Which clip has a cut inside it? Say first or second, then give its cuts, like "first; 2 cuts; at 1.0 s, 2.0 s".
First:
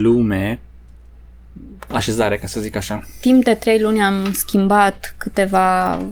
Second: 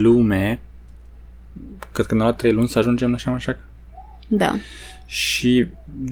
first; 1 cut; at 1.9 s